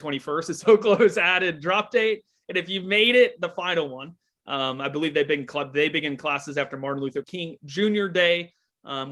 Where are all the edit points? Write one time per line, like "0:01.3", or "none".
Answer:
0:07.2